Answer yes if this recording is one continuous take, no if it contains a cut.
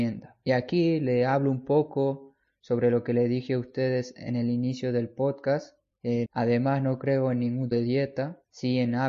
no